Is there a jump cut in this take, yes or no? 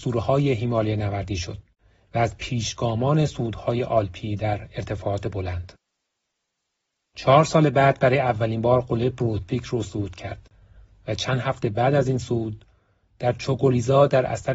no